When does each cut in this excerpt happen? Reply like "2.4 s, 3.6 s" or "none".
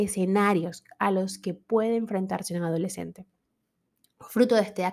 none